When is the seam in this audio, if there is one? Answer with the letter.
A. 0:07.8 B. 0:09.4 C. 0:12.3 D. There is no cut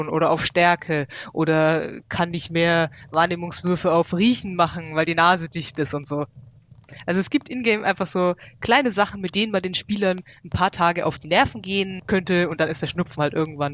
D